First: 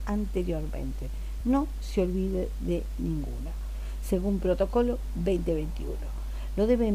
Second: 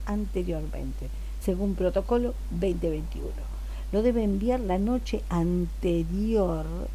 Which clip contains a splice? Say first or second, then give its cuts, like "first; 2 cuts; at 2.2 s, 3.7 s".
second; 1 cut; at 1.4 s